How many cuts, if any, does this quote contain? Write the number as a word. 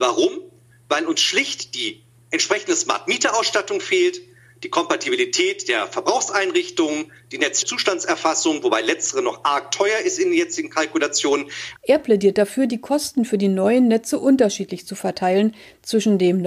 one